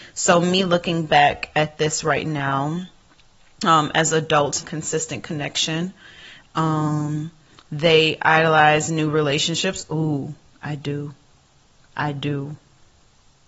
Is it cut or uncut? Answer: cut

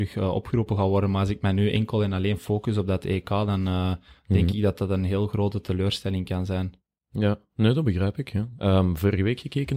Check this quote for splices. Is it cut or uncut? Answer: uncut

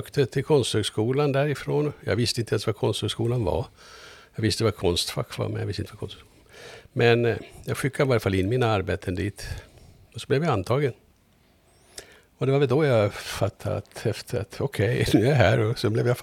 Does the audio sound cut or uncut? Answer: uncut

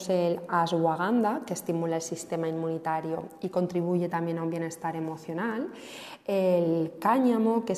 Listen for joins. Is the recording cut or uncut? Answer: uncut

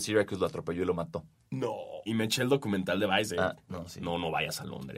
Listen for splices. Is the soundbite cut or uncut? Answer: cut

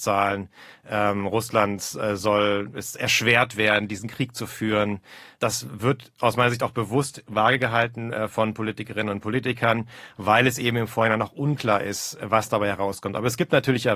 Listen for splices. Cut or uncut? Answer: uncut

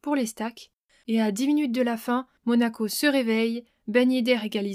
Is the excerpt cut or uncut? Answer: uncut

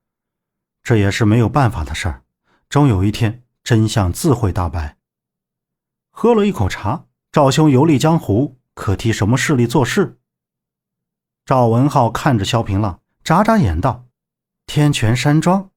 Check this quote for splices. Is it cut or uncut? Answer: cut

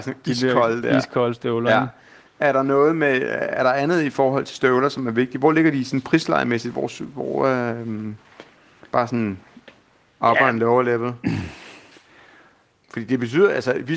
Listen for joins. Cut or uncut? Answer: uncut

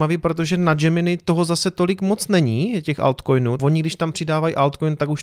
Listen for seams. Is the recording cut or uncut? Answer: cut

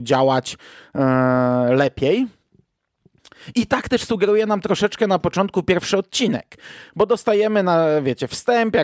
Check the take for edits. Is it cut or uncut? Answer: uncut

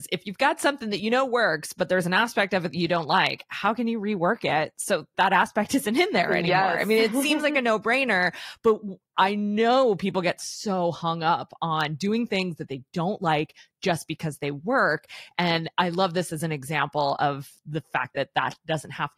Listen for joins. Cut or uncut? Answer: cut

